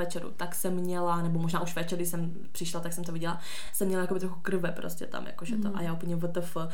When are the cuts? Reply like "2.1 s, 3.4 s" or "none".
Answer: none